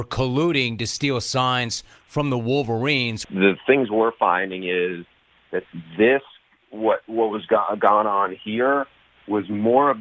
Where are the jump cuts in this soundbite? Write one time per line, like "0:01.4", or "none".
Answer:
0:03.2